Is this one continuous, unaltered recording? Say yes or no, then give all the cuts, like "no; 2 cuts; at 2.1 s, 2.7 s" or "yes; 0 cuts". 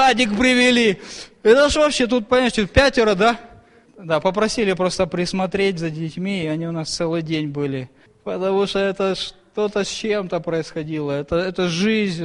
no; 2 cuts; at 3.9 s, 8.1 s